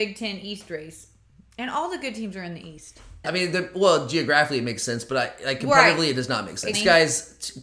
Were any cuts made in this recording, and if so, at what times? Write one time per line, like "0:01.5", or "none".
0:03.2
0:06.7